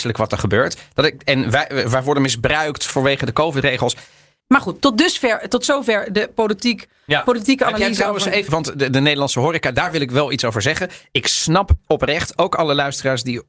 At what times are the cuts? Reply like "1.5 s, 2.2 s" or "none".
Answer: 4.4 s, 8.5 s